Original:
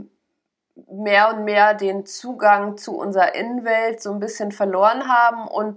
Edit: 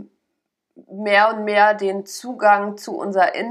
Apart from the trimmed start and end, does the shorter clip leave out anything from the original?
no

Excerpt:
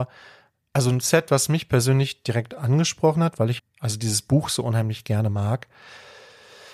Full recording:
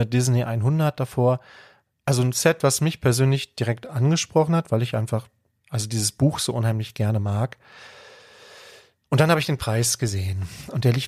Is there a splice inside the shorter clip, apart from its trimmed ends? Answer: yes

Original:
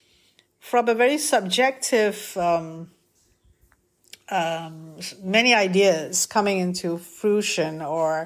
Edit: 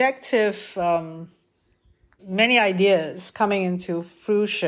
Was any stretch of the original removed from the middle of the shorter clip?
yes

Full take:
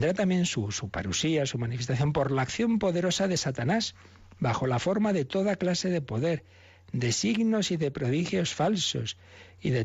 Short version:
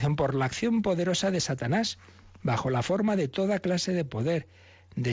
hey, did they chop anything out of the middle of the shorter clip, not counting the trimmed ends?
no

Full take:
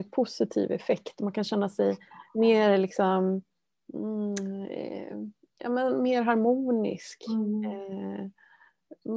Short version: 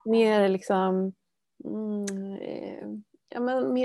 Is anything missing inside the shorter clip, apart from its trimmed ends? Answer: no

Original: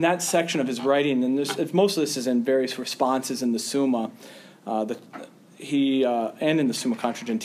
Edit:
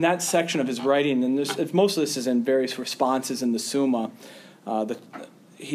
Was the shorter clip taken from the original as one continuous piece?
yes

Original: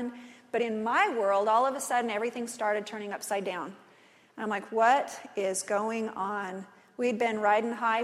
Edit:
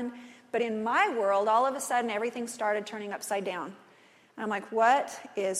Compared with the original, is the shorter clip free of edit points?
yes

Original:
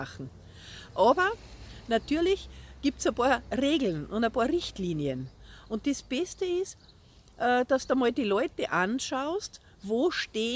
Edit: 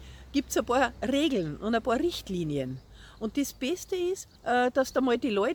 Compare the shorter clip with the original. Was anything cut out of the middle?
yes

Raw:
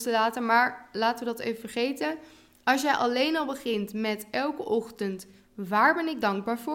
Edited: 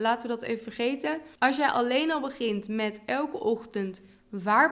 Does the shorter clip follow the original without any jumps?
no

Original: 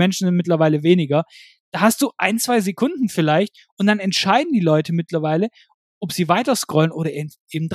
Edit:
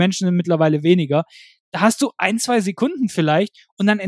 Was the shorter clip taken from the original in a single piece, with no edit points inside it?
yes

